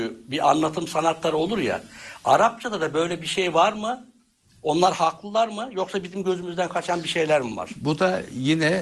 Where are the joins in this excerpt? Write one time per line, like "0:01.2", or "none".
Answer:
none